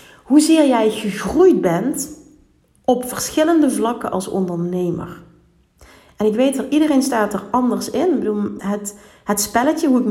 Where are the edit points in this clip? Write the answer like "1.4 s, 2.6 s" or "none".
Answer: 8.6 s